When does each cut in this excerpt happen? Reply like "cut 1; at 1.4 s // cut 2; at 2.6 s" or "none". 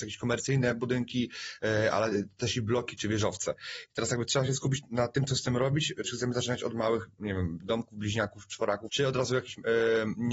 cut 1; at 6.0 s // cut 2; at 8.9 s